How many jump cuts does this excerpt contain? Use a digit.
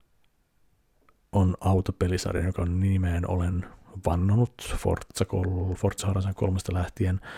0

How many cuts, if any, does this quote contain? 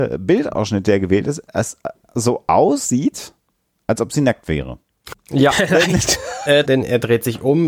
2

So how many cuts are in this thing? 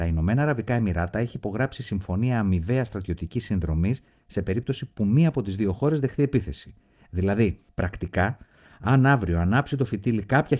0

